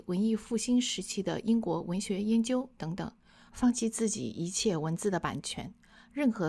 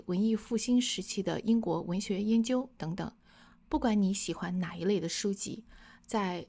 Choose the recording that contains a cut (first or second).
first